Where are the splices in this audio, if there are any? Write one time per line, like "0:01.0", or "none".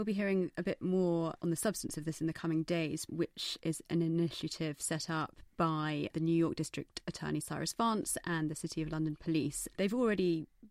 0:03.1
0:09.7